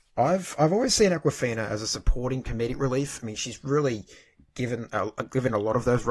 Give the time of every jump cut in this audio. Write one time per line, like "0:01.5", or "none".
none